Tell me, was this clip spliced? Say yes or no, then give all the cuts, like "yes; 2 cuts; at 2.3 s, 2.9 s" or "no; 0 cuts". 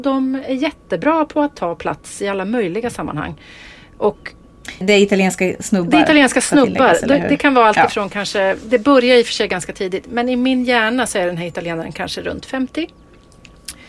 yes; 1 cut; at 4.8 s